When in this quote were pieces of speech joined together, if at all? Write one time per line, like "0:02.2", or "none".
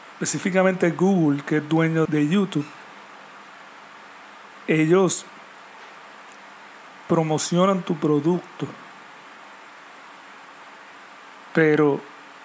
0:02.0